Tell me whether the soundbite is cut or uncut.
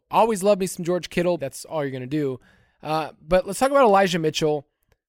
cut